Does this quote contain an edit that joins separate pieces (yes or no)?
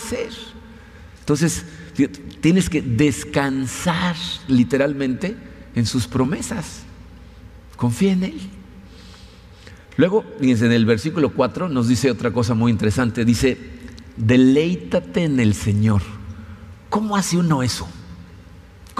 yes